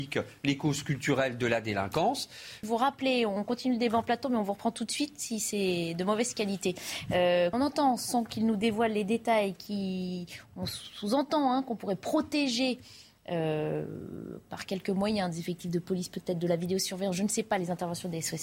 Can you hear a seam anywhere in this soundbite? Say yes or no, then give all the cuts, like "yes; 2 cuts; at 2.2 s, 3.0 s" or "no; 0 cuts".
yes; 2 cuts; at 2.6 s, 7.5 s